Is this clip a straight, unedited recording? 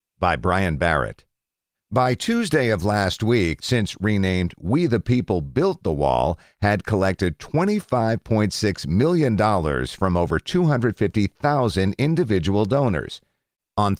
no; 2 cuts; at 1.7 s, 3.6 s

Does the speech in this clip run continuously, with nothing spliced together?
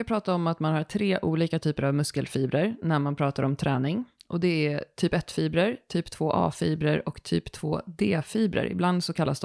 yes; 0 cuts

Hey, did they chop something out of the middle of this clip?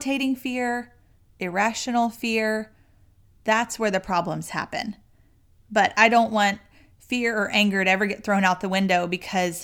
no; 0 cuts

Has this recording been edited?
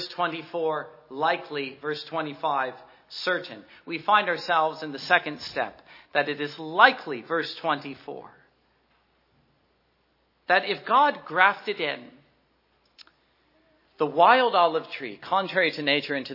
no; 0 cuts

